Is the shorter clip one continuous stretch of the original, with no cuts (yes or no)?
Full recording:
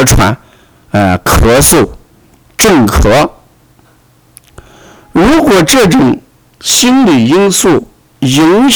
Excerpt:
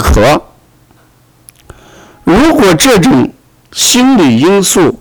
yes